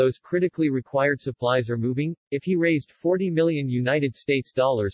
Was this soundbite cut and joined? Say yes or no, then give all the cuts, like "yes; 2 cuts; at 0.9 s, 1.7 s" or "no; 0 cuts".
yes; 1 cut; at 2.2 s